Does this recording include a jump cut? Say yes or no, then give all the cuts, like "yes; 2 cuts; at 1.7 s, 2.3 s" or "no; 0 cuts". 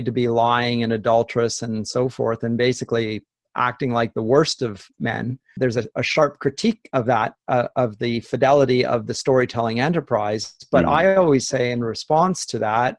no; 0 cuts